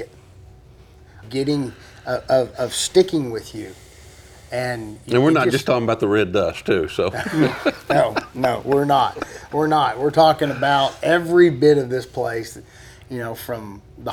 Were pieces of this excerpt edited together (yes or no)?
yes